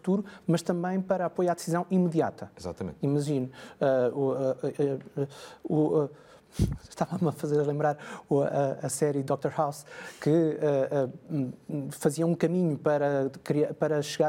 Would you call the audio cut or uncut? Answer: uncut